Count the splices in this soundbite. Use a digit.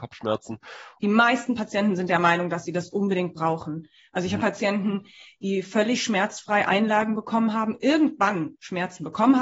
2